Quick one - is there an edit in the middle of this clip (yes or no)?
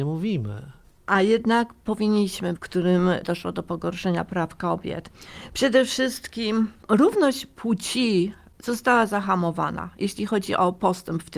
yes